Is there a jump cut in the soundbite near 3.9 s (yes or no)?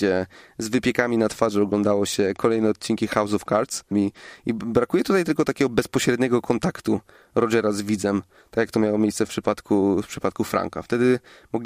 yes